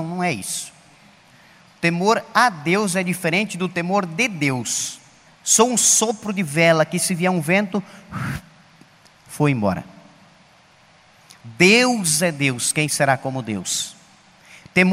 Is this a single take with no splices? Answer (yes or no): no